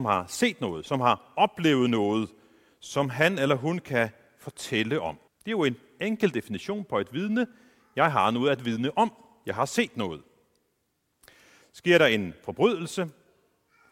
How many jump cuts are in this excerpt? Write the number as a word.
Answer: one